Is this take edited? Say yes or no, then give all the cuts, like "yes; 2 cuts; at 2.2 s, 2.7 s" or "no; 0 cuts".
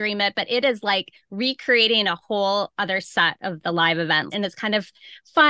yes; 1 cut; at 4.3 s